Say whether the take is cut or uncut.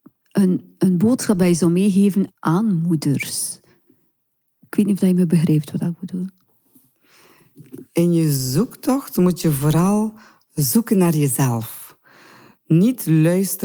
uncut